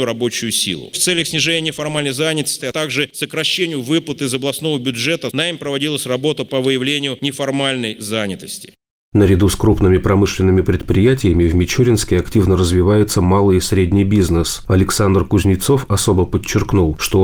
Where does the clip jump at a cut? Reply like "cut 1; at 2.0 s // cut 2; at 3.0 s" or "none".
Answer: cut 1; at 2.6 s // cut 2; at 5.3 s